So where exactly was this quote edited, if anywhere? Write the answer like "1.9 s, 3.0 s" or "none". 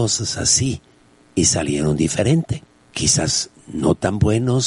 none